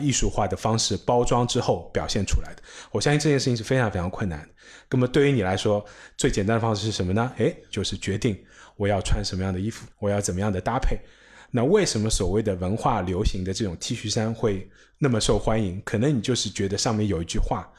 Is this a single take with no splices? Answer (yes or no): no